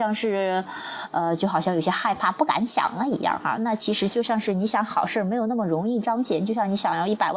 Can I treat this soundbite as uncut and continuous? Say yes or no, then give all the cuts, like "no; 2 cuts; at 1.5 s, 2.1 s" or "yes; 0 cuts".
yes; 0 cuts